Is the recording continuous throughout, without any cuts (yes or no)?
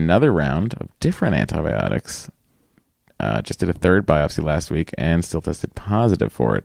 yes